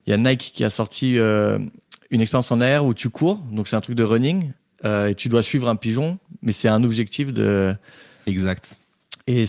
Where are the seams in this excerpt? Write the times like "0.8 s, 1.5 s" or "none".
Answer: none